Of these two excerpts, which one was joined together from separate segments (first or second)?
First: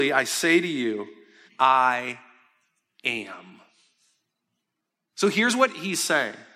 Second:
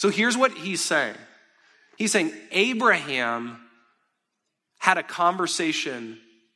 first